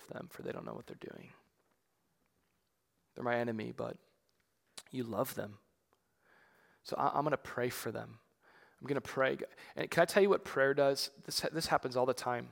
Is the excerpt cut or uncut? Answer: uncut